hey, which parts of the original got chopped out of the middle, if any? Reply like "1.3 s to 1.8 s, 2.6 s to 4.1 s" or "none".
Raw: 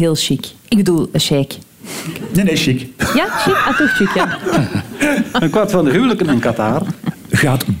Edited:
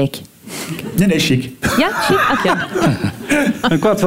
3.7 s to 4.1 s